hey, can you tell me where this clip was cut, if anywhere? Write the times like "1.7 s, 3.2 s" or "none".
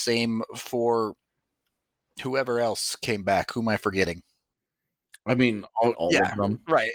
5.9 s